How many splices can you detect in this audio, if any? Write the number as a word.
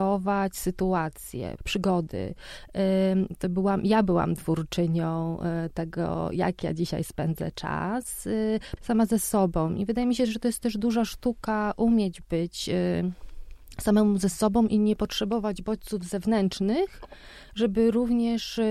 two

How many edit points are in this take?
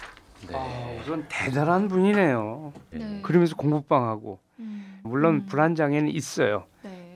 two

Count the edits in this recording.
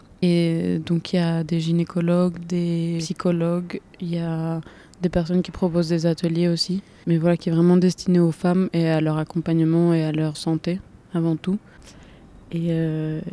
two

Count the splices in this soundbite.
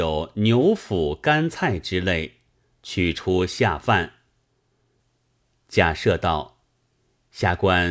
one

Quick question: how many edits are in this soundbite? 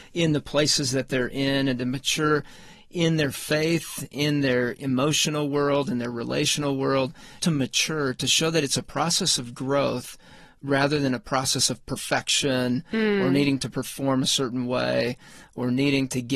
one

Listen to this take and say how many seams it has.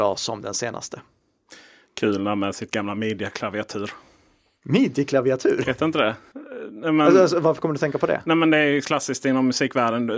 zero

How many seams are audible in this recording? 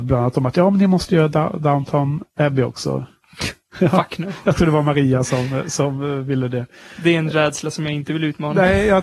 zero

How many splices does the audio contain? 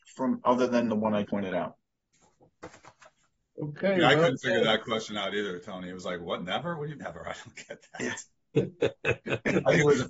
two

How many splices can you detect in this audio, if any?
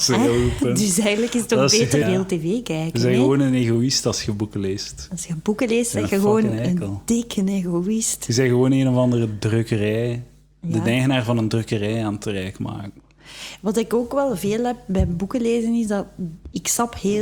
one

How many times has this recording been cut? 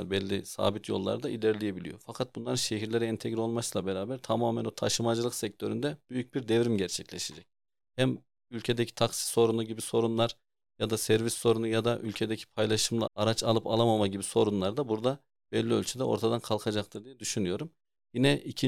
one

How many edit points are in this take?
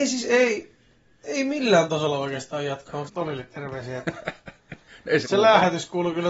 two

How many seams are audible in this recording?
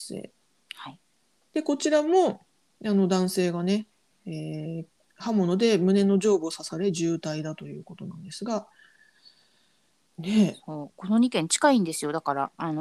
zero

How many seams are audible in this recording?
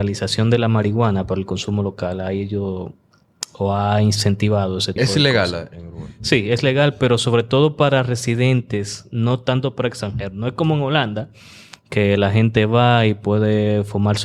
one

